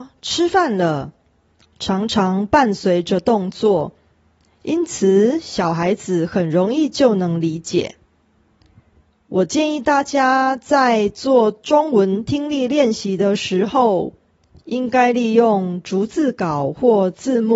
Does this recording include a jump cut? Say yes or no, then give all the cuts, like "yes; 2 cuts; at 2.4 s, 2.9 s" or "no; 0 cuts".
no; 0 cuts